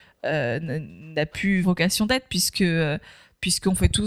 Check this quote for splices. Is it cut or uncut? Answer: cut